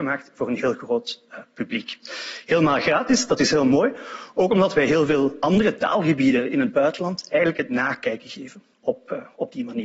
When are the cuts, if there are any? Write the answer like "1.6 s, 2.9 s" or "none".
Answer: none